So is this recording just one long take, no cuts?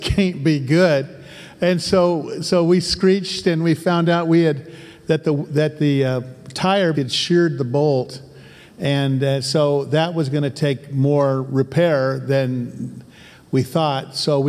no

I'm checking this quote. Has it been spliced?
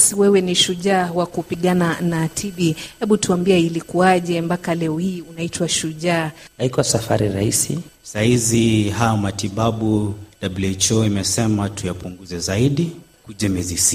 yes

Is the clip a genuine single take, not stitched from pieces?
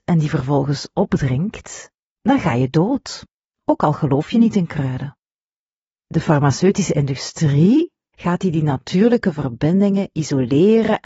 no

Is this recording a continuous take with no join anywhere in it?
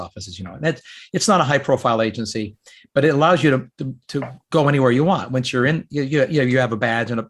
yes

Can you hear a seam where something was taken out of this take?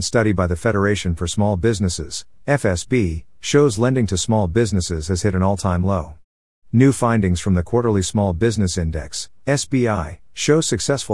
no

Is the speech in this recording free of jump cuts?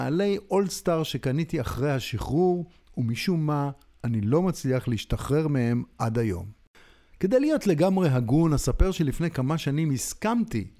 yes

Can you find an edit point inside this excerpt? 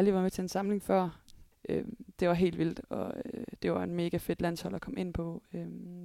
yes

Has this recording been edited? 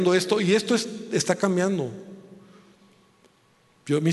no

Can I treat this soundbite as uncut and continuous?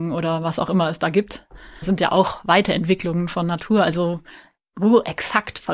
no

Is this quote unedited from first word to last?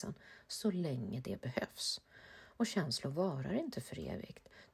yes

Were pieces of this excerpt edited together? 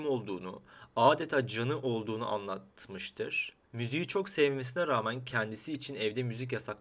yes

